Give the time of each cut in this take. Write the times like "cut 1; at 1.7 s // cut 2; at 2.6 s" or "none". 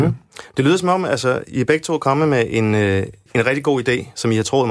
cut 1; at 3.3 s